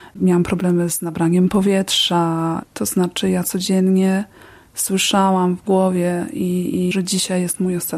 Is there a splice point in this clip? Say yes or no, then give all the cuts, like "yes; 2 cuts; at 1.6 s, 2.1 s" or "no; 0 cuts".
yes; 2 cuts; at 2.6 s, 6.9 s